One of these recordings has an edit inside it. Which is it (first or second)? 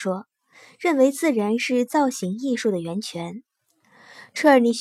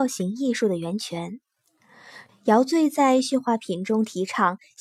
second